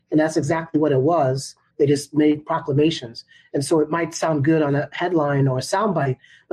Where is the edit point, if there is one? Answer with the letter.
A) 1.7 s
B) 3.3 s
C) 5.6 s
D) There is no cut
A